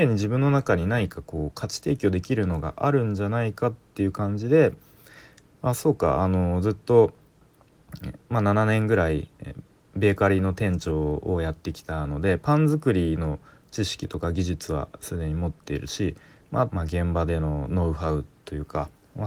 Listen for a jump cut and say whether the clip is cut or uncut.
cut